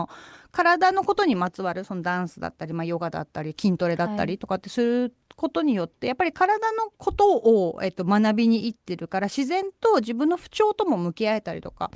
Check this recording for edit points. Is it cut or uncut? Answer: cut